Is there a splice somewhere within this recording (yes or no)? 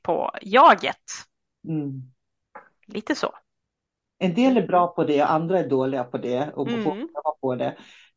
no